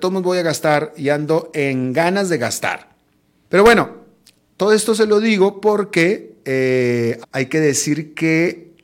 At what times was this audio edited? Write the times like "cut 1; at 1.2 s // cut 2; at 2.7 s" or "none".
cut 1; at 3.4 s // cut 2; at 7.2 s